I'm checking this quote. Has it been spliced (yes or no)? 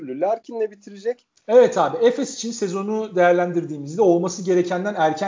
yes